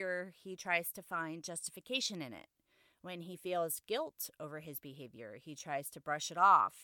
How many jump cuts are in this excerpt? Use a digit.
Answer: 0